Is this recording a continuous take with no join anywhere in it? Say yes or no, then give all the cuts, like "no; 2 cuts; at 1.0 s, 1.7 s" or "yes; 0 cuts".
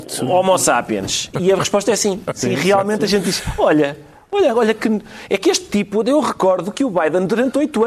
yes; 0 cuts